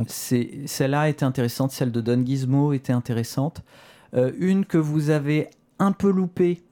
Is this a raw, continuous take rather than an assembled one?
yes; 0 cuts

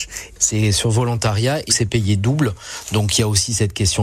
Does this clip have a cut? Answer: yes; 1 cut; at 1.7 s

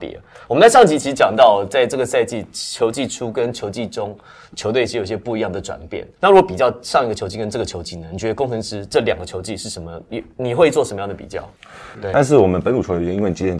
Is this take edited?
yes; 1 cut; at 11.9 s

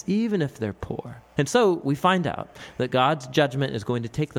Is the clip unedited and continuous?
yes; 0 cuts

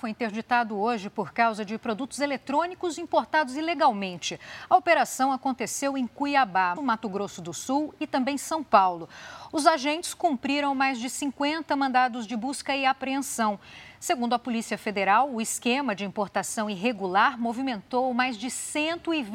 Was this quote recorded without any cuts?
no; 1 cut; at 6.8 s

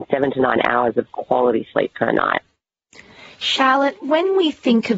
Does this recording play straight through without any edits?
yes; 0 cuts

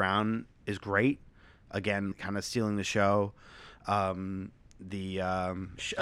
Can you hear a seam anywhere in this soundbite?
yes; 1 cut; at 2.1 s

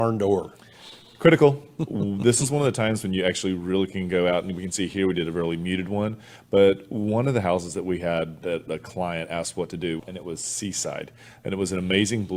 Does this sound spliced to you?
yes; 1 cut; at 10.0 s

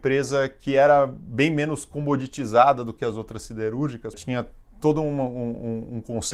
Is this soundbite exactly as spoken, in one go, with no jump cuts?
no; 1 cut; at 4.1 s

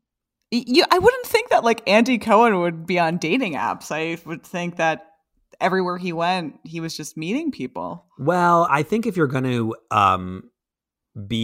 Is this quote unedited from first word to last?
yes; 0 cuts

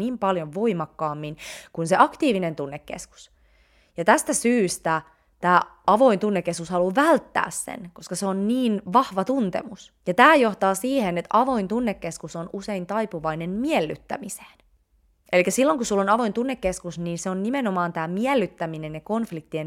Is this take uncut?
no; 1 cut; at 10.0 s

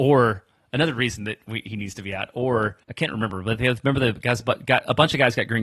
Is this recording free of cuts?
no; 1 cut; at 2.8 s

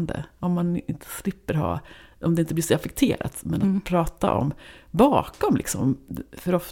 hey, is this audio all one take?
yes; 0 cuts

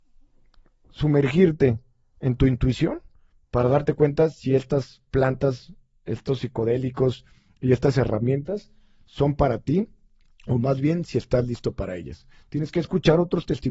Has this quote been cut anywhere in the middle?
no; 0 cuts

